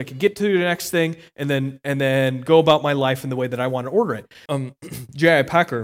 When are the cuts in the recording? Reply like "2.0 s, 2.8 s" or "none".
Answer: 4.5 s

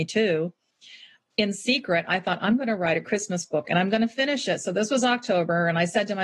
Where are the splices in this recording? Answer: none

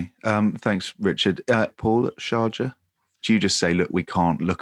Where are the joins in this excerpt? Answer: 1.7 s, 3.2 s

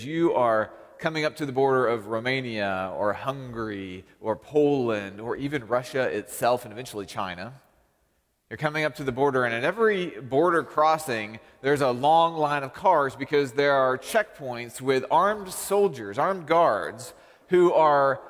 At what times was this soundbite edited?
none

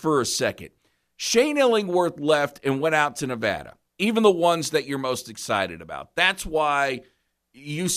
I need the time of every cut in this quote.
3.9 s

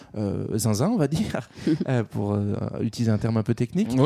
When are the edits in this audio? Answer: none

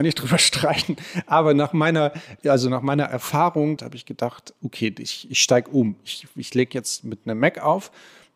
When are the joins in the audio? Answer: 2.4 s, 3.8 s

